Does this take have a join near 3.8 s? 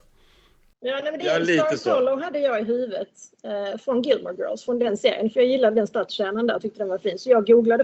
no; 0 cuts

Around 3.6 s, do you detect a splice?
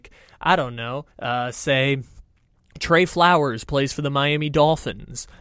no; 1 cut; at 1.1 s

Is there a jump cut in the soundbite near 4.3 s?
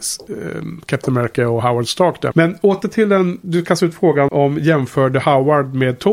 yes; 2 cuts; at 2.3 s, 4.3 s

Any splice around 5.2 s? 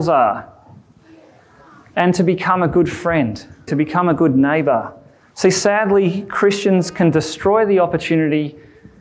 yes; 2 cuts; at 3.7 s, 5.2 s

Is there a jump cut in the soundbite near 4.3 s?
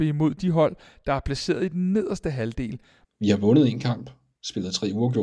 no; 1 cut; at 3.0 s

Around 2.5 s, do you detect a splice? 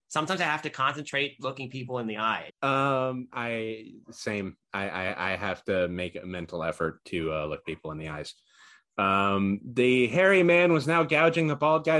yes; 1 cut; at 2.5 s

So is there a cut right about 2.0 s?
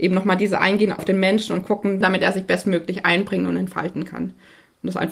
yes; 2 cuts; at 1.0 s, 2.0 s

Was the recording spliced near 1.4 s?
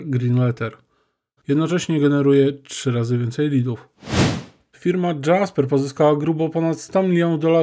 yes; 2 cuts; at 1.4 s, 4.7 s

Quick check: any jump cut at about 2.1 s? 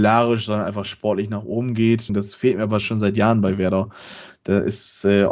yes; 1 cut; at 2.1 s

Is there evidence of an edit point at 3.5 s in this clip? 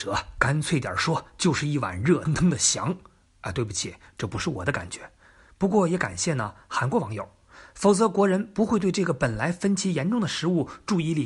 no; 1 cut; at 2.3 s

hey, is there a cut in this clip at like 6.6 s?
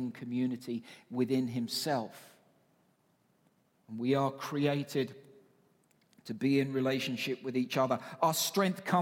no; 1 cut; at 3.8 s

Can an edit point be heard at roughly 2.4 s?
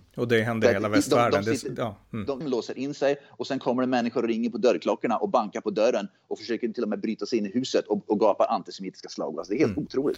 yes; 1 cut; at 2.4 s

